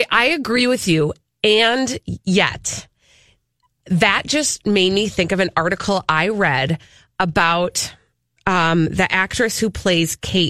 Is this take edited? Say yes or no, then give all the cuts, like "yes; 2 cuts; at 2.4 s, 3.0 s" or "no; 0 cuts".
no; 0 cuts